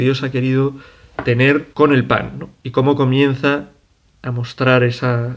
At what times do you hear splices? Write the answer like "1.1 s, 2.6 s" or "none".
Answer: 1.7 s

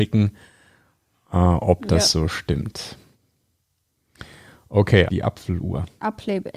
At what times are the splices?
5.1 s

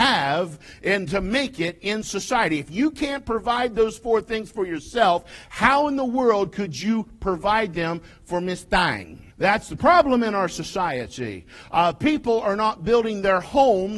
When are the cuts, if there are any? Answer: 9.3 s

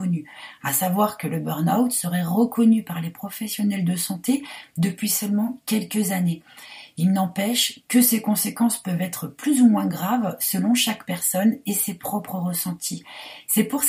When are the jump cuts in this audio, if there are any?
none

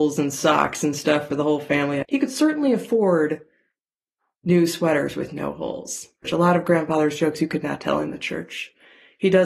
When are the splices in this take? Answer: 2.0 s, 6.2 s

